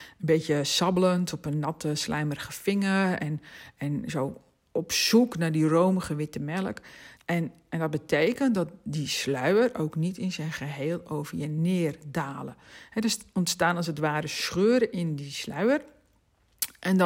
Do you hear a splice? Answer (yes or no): yes